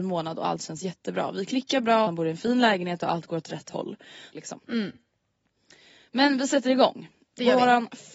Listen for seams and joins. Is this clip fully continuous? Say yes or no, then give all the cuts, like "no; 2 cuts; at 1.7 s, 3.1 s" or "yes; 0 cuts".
no; 2 cuts; at 2.0 s, 4.3 s